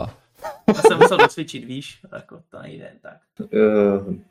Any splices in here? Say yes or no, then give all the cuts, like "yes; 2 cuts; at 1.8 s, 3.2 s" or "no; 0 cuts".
yes; 1 cut; at 3.4 s